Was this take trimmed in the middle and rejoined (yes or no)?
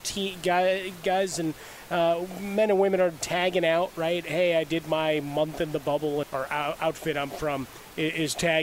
yes